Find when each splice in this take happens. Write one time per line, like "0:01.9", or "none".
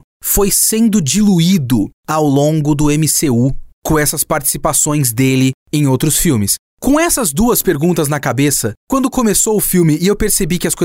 0:06.7